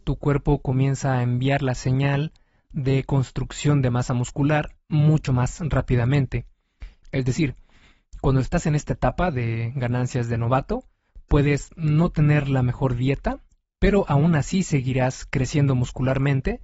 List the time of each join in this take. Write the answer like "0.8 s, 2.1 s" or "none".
7.0 s